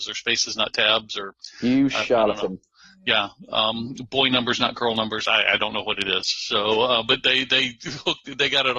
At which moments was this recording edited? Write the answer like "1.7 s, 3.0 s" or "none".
none